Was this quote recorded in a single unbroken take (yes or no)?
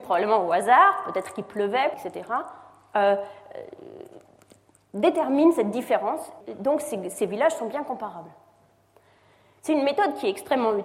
no